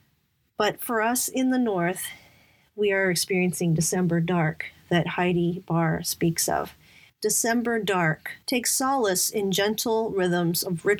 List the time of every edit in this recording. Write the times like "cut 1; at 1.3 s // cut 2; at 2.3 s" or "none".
cut 1; at 7.1 s // cut 2; at 8.4 s